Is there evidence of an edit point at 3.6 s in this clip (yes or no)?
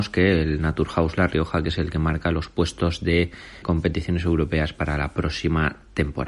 yes